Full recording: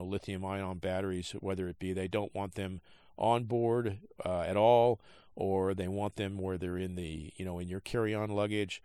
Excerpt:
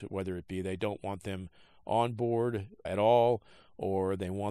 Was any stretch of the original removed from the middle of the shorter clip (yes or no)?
yes